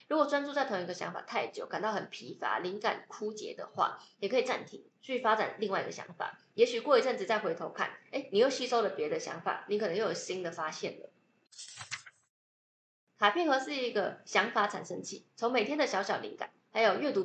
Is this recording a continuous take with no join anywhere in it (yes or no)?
yes